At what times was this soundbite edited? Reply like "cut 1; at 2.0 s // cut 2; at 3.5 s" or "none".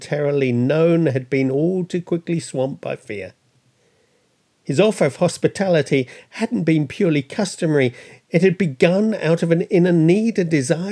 none